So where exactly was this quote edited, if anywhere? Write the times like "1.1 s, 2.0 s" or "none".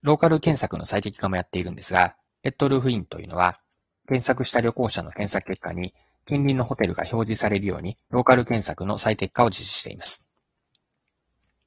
8.0 s